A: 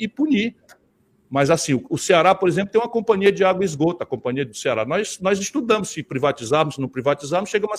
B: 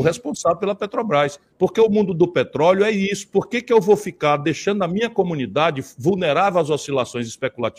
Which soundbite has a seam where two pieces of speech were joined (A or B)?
B